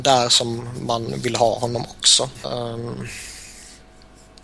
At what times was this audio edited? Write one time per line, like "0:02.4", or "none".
0:02.4